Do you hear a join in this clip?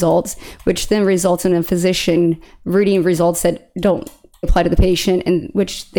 yes; 1 cut; at 4.4 s

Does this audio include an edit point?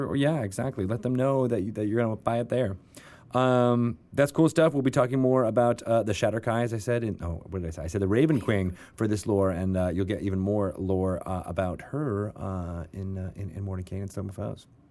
no; 0 cuts

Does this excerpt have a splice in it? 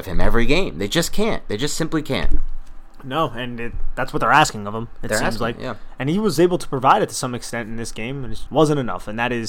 yes; 1 cut; at 8.5 s

